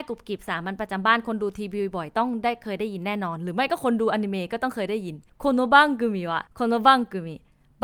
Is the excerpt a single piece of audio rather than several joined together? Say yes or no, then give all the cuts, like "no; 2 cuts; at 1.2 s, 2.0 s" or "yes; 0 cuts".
no; 1 cut; at 6.5 s